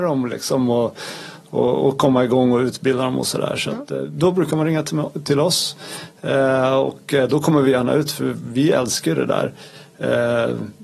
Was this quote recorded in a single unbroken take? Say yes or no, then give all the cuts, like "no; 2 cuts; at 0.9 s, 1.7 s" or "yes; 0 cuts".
yes; 0 cuts